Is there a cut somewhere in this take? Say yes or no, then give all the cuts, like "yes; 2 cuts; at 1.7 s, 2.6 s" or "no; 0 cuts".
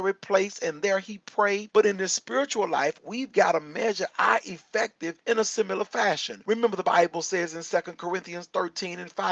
yes; 1 cut; at 1.7 s